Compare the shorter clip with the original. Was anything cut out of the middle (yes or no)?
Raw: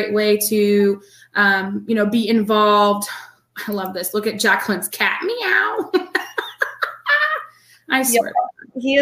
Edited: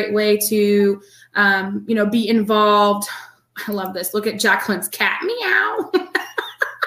no